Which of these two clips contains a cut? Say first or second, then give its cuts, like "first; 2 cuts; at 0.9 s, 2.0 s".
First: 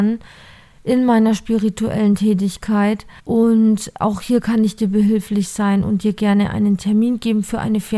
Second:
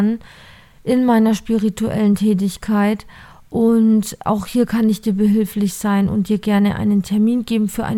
first; 1 cut; at 3.2 s